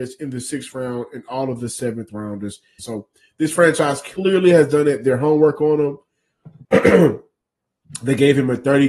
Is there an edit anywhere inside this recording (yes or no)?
yes